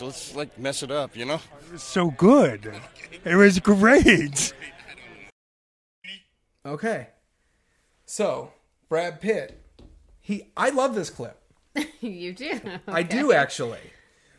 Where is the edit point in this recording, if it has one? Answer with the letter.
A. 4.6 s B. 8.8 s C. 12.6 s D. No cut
C